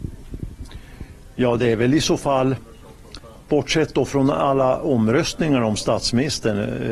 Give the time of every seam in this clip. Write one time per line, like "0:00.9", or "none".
none

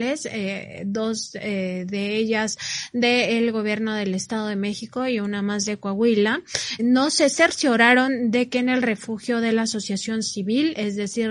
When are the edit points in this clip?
0:06.8

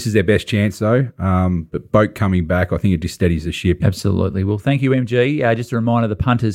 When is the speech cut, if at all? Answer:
0:03.8

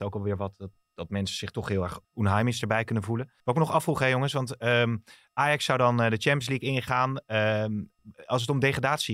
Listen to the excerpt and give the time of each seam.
0:02.0
0:03.4

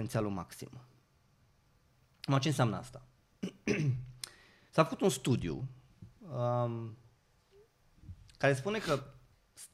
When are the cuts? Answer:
none

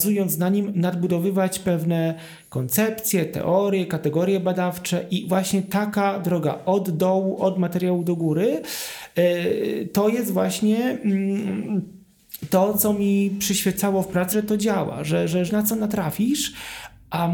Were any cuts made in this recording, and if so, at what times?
0:14.3
0:15.5

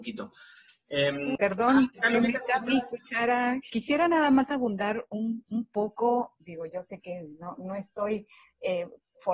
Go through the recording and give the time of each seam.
0:01.4
0:03.7

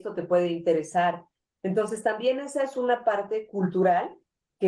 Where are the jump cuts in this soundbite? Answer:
none

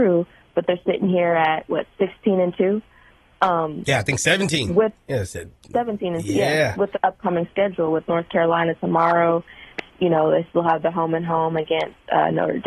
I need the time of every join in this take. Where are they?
0:06.9

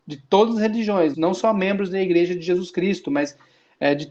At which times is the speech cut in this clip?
0:01.1

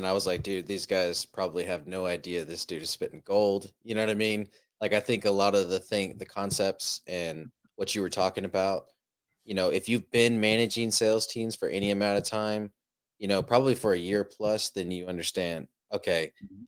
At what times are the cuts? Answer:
none

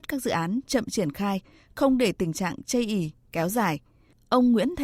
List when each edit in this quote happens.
none

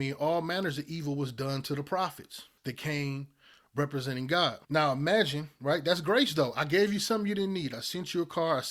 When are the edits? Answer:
0:02.6
0:04.6

